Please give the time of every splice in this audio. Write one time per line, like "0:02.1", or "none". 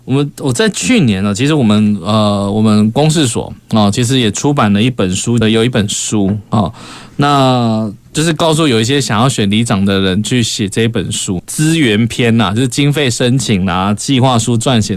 0:05.4
0:11.4